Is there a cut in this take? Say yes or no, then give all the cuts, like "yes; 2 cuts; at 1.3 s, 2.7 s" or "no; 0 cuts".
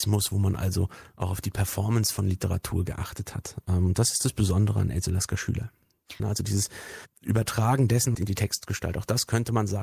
yes; 2 cuts; at 6.2 s, 8.1 s